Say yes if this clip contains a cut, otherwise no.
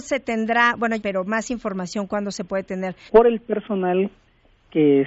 yes